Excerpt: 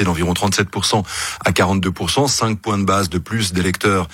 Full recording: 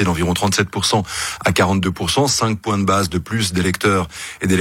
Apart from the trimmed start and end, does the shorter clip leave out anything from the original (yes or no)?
no